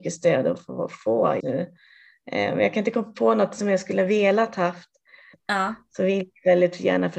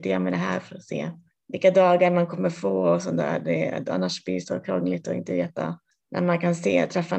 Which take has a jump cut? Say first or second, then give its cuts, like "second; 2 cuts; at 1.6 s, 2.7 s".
first; 2 cuts; at 1.4 s, 5.3 s